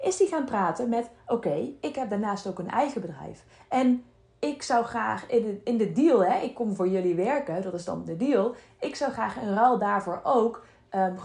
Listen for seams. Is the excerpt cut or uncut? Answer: uncut